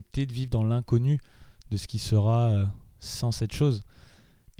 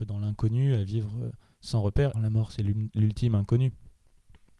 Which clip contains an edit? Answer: second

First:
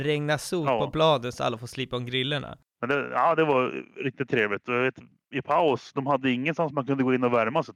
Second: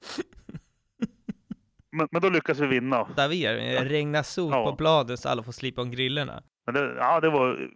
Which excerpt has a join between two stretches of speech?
second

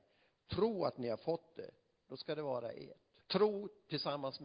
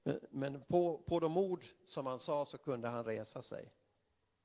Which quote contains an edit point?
first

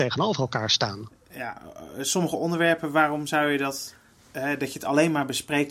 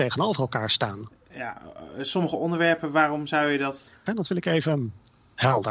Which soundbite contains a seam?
second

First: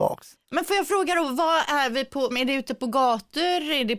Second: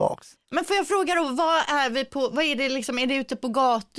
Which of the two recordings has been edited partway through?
first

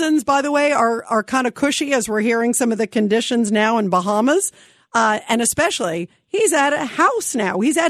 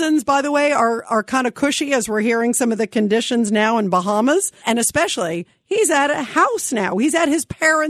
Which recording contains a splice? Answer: second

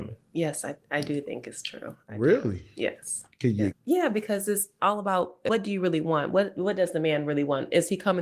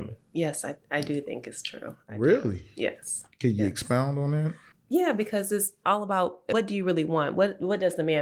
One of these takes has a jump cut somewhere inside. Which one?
first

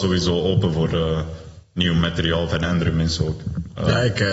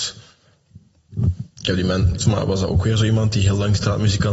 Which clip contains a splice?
second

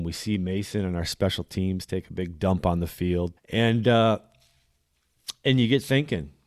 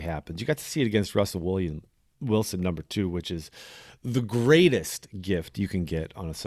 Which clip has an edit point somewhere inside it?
first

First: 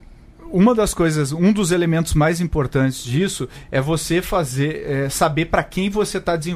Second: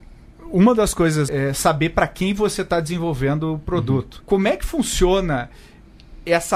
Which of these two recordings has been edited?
second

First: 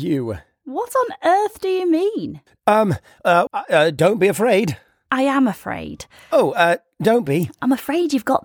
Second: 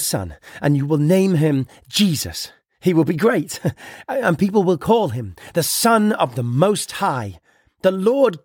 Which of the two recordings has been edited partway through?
first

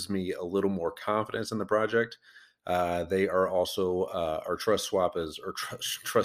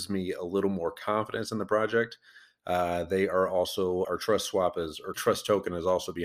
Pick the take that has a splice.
second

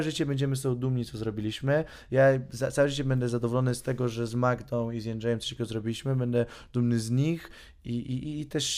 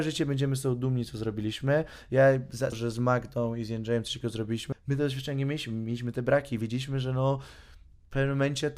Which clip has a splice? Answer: second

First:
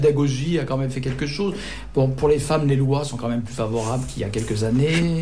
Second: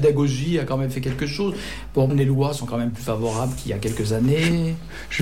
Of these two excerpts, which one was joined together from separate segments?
second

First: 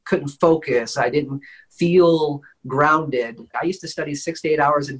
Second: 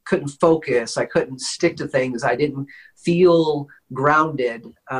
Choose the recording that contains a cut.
first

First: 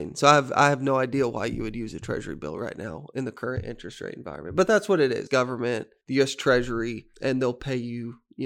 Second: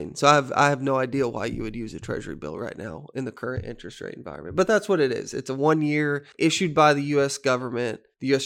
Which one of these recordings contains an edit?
first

